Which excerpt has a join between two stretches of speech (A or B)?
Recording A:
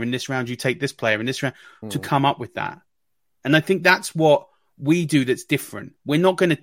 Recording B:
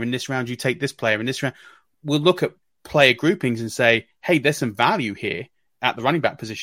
A